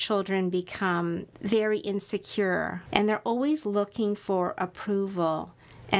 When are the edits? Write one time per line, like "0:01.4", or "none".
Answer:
0:01.3
0:02.9